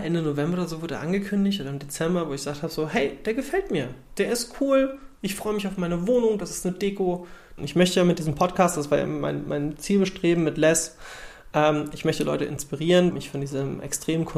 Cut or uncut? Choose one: cut